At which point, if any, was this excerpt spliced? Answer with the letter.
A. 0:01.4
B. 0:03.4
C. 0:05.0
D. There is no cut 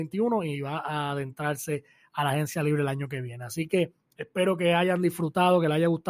D